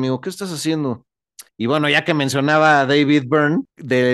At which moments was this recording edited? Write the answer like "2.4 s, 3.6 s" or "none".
1.5 s